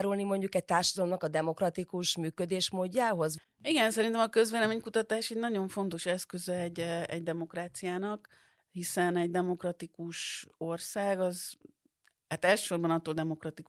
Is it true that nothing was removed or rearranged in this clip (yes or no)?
yes